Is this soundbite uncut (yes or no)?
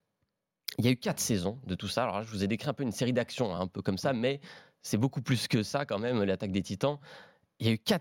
yes